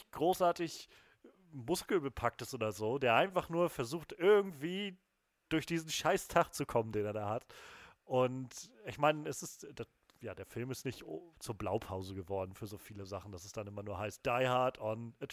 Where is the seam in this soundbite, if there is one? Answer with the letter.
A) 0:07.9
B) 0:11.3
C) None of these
B